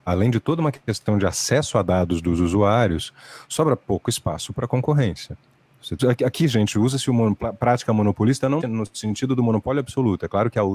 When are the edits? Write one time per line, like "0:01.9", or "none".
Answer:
0:06.0
0:08.6